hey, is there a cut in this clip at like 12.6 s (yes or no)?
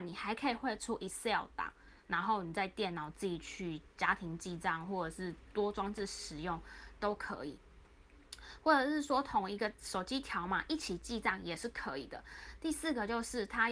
no